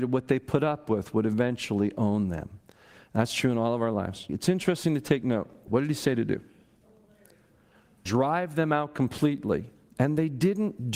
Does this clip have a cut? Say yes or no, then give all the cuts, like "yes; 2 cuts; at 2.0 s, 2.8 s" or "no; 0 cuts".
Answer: yes; 2 cuts; at 4.3 s, 5.7 s